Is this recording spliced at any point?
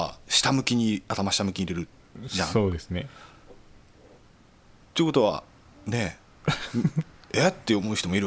no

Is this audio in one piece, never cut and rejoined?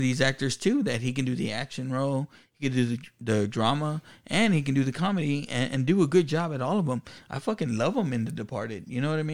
yes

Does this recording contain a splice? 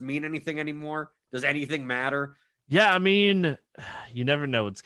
yes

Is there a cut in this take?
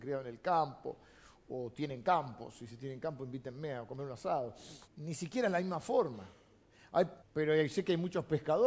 yes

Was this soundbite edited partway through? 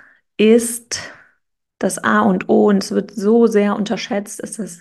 no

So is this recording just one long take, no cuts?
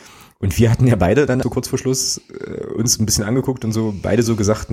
no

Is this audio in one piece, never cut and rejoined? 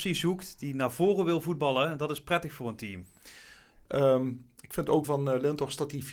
no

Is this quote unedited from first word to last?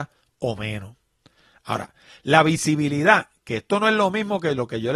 yes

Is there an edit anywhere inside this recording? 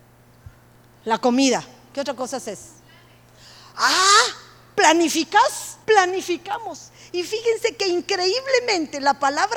yes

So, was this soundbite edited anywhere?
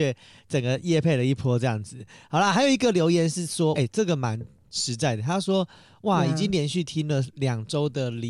yes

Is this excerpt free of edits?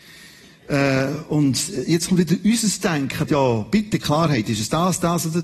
no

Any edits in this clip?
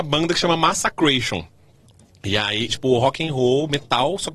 yes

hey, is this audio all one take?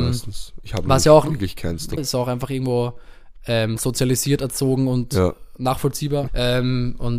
no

